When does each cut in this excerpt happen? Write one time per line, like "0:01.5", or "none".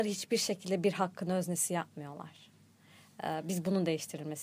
none